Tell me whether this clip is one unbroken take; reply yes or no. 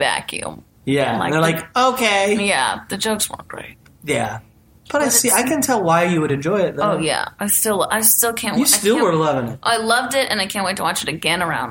yes